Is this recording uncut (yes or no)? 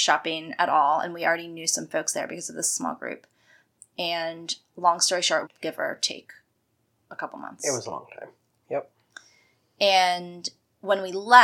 no